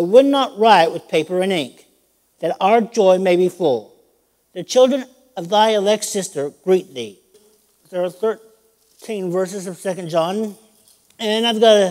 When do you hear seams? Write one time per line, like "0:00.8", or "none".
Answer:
0:02.3
0:07.3